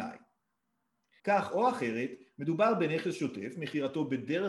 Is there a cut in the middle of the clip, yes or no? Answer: yes